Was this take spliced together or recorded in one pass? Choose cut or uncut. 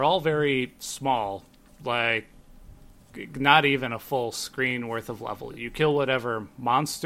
uncut